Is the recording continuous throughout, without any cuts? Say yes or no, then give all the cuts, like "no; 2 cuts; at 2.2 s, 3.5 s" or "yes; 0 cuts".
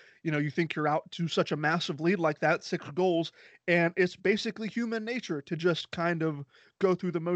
yes; 0 cuts